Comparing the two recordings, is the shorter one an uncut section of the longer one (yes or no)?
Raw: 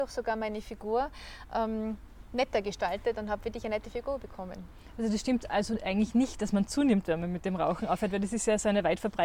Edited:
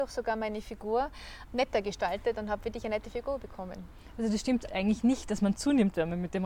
no